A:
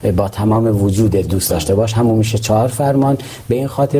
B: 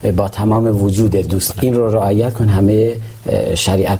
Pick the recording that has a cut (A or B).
B